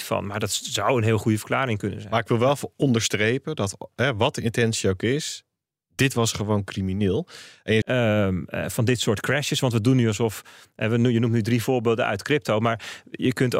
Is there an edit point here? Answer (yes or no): yes